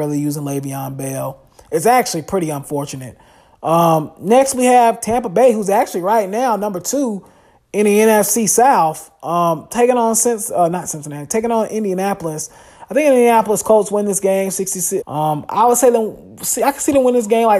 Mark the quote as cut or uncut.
cut